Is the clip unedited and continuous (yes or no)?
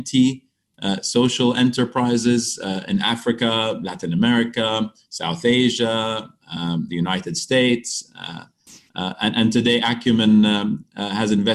yes